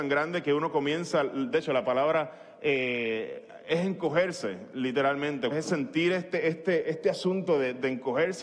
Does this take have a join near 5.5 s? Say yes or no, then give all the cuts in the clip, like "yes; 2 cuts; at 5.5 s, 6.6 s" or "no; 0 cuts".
yes; 1 cut; at 5.5 s